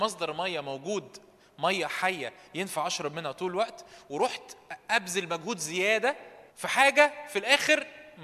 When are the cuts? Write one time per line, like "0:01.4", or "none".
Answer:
0:06.5